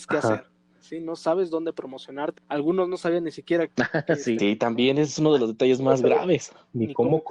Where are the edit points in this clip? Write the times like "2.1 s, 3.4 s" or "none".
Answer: 2.4 s, 4.4 s